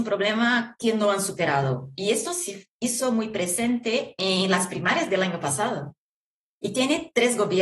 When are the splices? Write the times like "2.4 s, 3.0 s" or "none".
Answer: 6.5 s

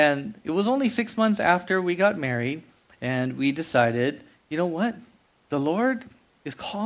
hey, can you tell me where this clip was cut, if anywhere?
none

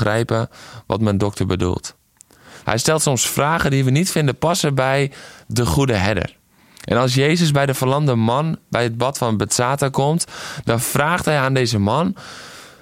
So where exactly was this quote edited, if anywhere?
2.6 s

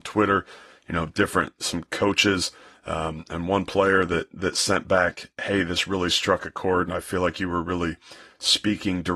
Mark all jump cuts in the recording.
none

